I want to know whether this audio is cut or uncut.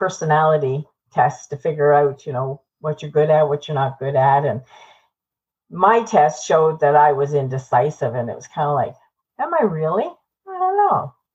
cut